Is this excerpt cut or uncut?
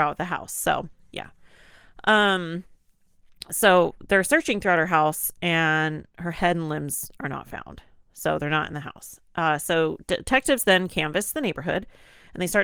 uncut